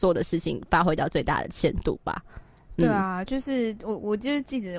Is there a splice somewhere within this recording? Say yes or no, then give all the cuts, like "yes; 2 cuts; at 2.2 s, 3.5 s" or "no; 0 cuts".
no; 0 cuts